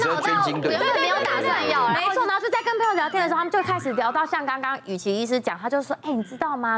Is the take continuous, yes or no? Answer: yes